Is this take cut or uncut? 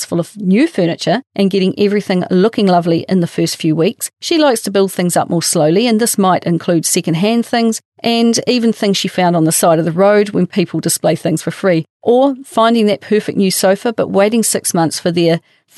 uncut